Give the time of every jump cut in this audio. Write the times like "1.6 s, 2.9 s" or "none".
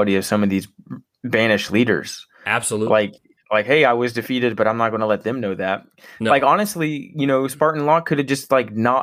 none